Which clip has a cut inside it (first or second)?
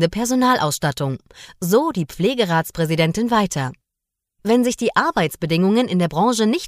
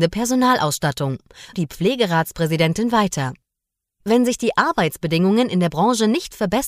second